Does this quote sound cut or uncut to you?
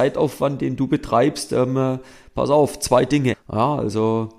cut